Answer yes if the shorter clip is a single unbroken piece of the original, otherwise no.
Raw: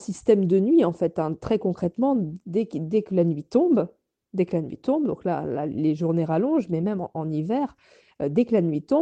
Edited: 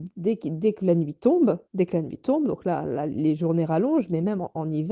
no